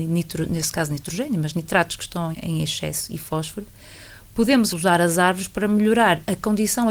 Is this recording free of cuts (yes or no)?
no